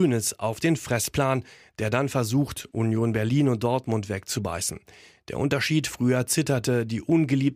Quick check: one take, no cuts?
yes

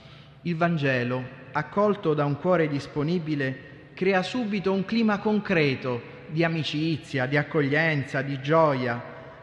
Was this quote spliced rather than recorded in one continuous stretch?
no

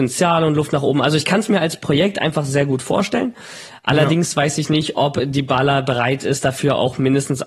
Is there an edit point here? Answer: no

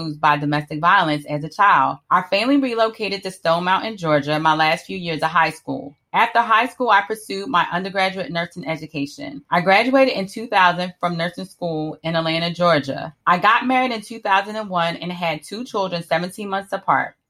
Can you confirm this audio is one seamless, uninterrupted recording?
no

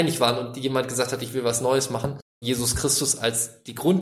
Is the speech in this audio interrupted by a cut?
yes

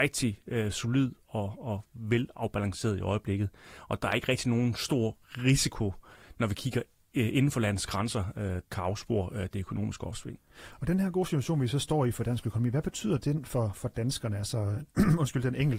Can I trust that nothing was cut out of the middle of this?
no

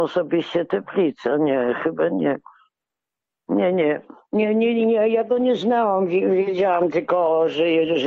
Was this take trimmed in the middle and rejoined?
no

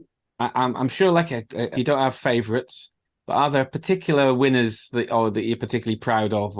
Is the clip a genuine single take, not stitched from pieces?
no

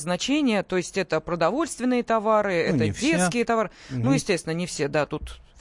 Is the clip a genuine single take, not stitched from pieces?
yes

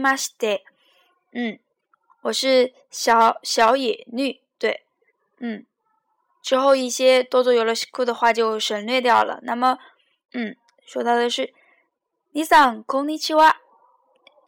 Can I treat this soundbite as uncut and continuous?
no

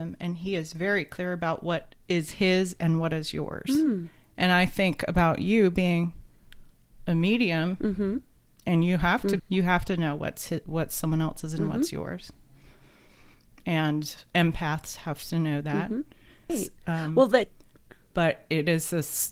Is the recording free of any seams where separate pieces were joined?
no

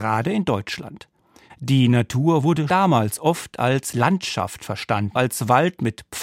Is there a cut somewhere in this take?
yes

